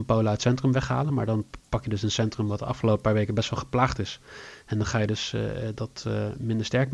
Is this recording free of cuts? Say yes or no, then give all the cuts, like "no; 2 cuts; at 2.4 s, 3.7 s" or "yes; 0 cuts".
yes; 0 cuts